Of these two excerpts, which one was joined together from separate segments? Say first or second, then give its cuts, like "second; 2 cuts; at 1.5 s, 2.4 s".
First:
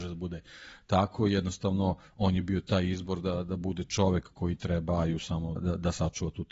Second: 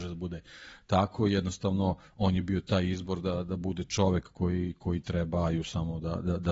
first; 2 cuts; at 4.3 s, 5.6 s